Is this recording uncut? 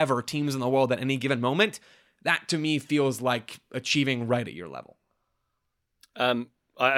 yes; 0 cuts

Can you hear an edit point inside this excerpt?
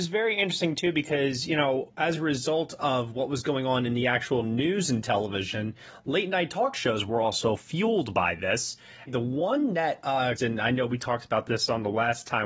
yes; 2 cuts; at 9.1 s, 10.4 s

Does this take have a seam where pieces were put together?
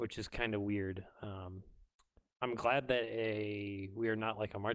no; 0 cuts

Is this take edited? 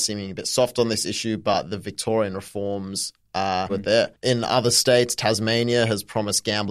yes; 1 cut; at 3.7 s

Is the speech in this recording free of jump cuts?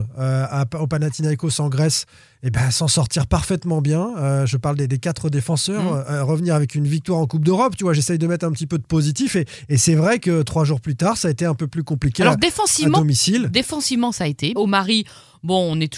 no; 1 cut; at 14.6 s

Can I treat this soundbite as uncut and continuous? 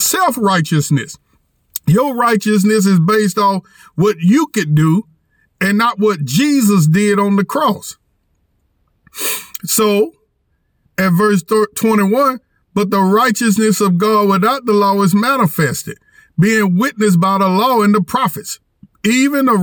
yes; 0 cuts

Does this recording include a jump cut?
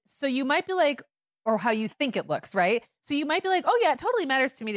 no; 0 cuts

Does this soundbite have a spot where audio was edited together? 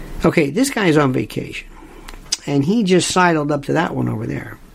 no; 0 cuts

